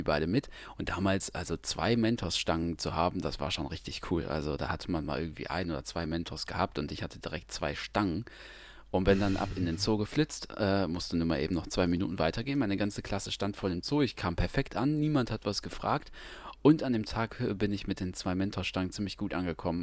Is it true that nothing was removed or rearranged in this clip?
yes; 0 cuts

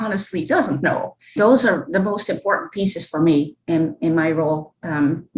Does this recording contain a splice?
yes; 1 cut; at 1.4 s

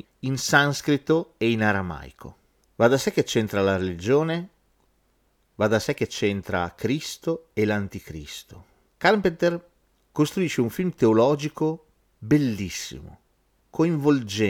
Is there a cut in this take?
no; 0 cuts

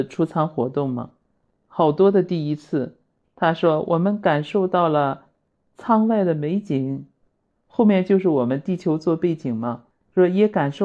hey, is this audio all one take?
yes; 0 cuts

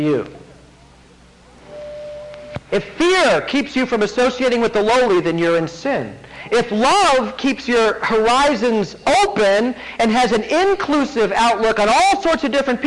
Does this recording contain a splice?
no; 0 cuts

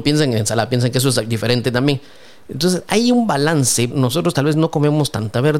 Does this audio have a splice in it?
yes; 1 cut; at 3.9 s

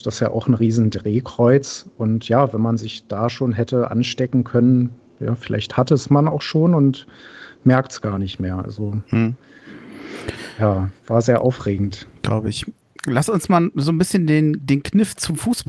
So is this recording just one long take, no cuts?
yes; 0 cuts

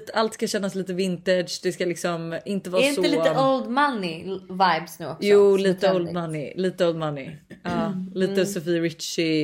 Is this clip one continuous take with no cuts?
yes; 0 cuts

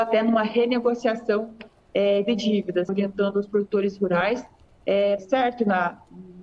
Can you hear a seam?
yes; 2 cuts; at 2.9 s, 5.2 s

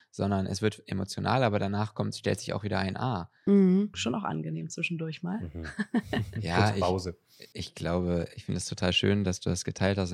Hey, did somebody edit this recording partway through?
yes; 1 cut; at 3.9 s

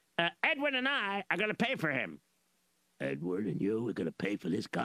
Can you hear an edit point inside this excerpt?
no; 0 cuts

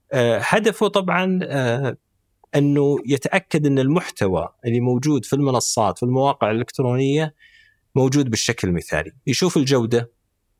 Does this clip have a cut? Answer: no; 0 cuts

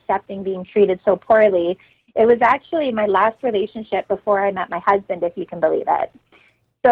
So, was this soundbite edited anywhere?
no; 0 cuts

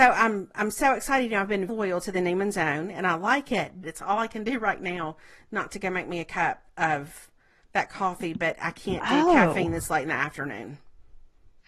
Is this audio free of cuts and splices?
no; 2 cuts; at 1.7 s, 3.8 s

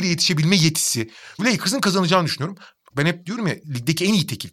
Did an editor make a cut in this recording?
yes; 2 cuts; at 1.4 s, 2.9 s

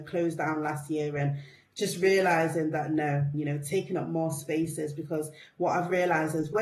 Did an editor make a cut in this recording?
yes; 1 cut; at 3.3 s

